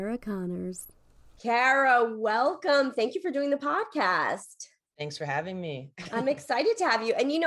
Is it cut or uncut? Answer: uncut